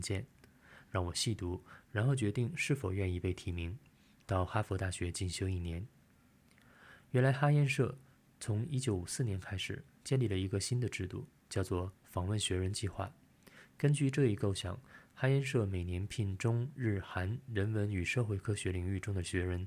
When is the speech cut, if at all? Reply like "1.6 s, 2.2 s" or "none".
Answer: none

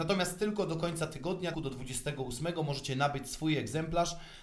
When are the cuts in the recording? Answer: 1.5 s

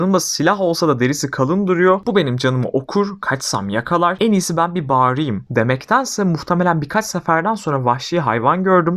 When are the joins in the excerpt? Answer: 4.2 s

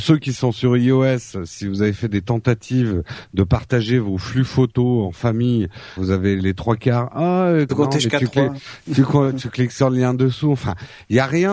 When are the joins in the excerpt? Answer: 6.0 s, 7.7 s

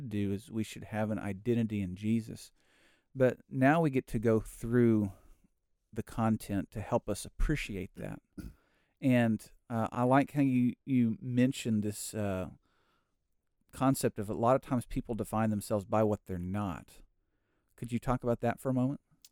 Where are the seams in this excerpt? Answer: none

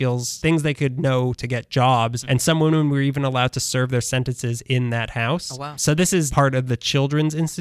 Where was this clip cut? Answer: 6.3 s

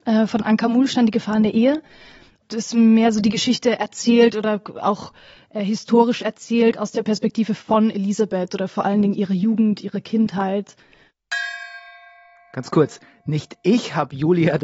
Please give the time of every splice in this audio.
none

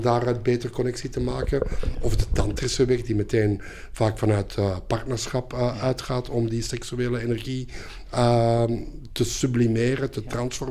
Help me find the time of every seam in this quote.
none

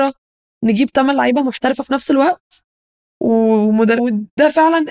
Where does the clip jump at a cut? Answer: 4.0 s

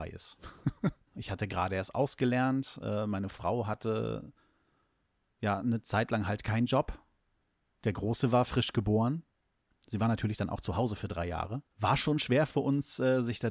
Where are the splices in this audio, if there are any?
1.1 s, 11.7 s

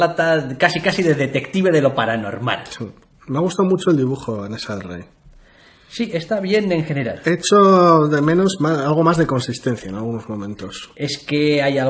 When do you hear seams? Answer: none

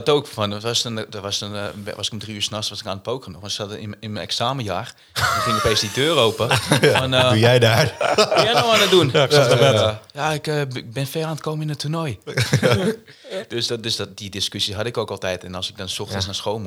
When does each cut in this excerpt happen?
none

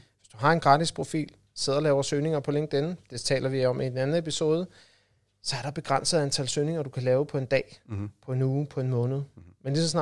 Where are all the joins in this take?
none

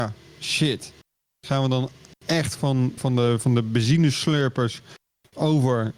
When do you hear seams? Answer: 3.0 s

